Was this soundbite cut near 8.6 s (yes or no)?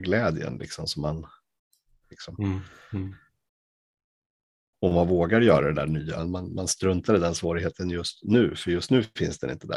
no